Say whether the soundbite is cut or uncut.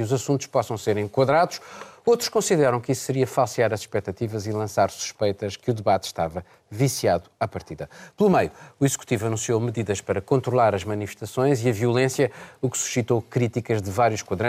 uncut